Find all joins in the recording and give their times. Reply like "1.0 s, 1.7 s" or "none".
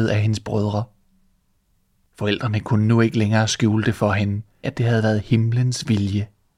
4.6 s